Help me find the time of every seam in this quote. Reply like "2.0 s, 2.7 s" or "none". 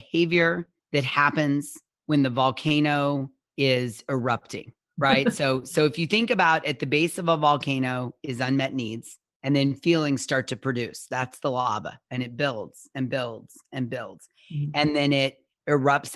none